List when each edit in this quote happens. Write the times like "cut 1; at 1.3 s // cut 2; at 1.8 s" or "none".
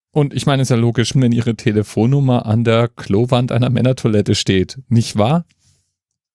cut 1; at 1.1 s